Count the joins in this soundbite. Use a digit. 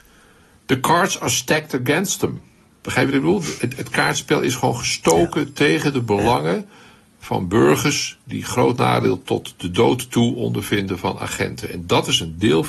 0